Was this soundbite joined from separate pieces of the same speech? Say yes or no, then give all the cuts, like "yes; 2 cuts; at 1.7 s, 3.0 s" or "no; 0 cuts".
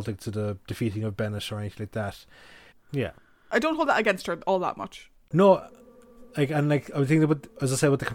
yes; 1 cut; at 2.7 s